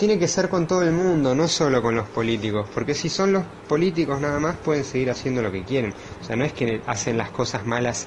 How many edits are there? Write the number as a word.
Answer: zero